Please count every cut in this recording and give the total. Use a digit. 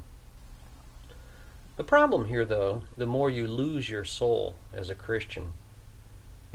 1